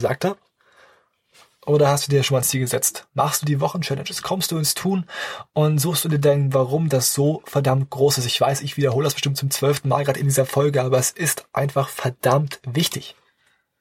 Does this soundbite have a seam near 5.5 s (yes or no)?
no